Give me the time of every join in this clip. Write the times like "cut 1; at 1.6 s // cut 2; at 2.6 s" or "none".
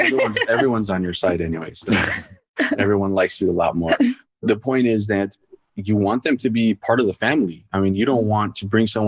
none